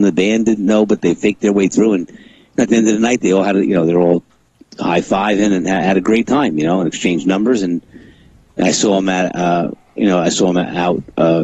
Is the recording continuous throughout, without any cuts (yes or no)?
yes